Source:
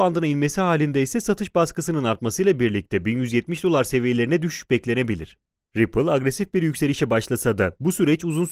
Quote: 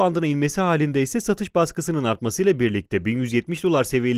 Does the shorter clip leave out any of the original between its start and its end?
no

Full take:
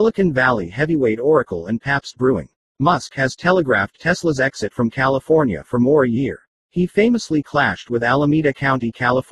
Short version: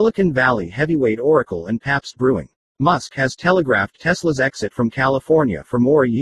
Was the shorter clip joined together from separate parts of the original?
no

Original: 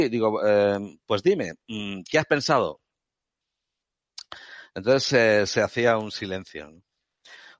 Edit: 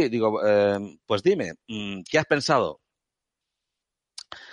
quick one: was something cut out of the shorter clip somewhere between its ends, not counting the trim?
no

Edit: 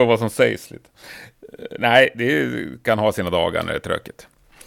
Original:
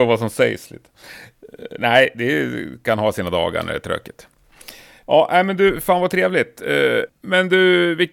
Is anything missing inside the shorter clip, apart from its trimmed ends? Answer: no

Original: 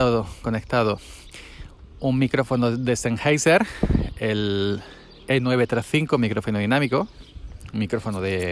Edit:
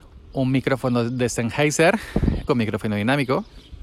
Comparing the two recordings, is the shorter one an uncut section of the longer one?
no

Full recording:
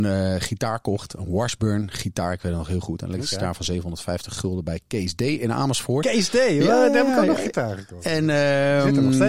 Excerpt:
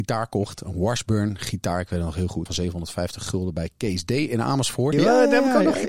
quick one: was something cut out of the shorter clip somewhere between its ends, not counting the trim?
yes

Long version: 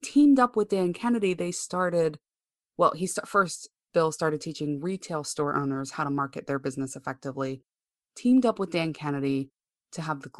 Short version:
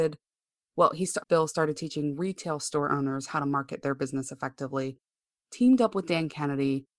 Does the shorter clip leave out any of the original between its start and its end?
yes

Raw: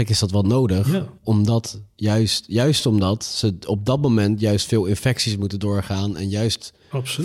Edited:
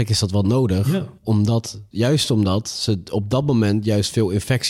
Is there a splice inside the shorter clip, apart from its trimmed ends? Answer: yes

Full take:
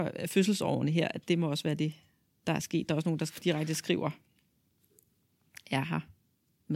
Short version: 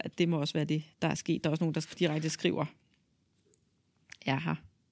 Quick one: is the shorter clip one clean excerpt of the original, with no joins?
no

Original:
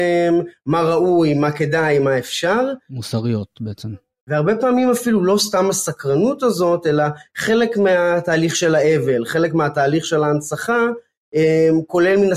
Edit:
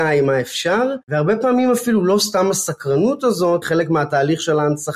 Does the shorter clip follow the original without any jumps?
no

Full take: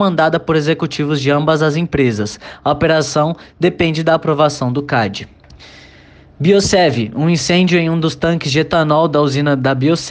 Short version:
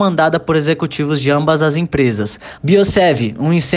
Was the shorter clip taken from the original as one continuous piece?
no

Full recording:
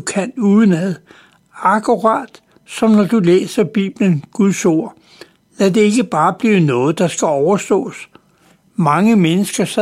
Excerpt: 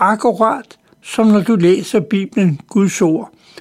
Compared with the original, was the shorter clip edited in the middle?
no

